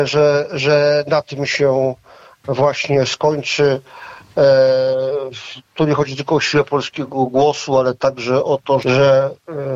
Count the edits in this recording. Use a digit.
1